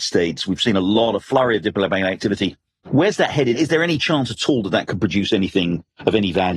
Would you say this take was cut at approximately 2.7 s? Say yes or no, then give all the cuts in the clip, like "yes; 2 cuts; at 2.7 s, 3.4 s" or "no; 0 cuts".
no; 0 cuts